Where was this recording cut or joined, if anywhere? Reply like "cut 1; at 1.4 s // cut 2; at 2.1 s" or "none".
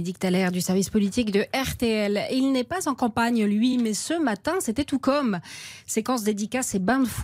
none

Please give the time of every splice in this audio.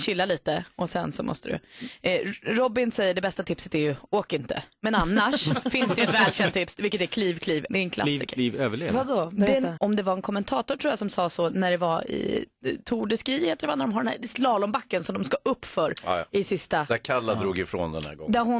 cut 1; at 7.7 s // cut 2; at 9.8 s

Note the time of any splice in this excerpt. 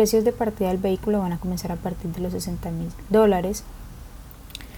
none

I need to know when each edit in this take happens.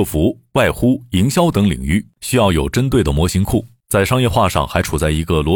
cut 1; at 3.8 s

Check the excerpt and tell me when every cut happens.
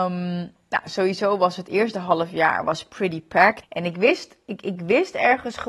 cut 1; at 3.6 s

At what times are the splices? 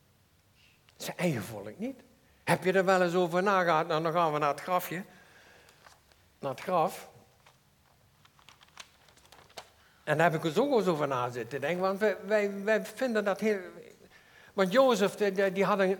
none

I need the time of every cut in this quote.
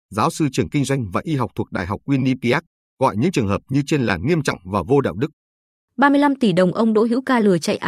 cut 1; at 5.8 s

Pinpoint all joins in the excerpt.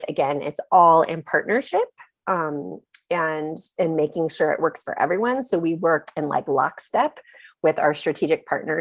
none

